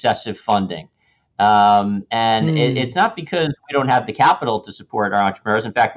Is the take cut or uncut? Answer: uncut